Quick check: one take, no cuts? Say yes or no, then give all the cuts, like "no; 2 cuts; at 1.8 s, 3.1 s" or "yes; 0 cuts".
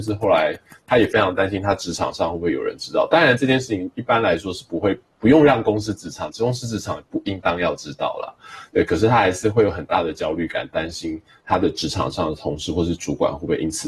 yes; 0 cuts